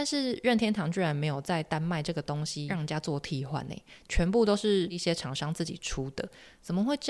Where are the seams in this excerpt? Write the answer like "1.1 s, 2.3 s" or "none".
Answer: none